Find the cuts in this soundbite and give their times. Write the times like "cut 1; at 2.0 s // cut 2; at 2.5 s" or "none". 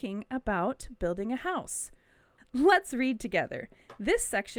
cut 1; at 2.4 s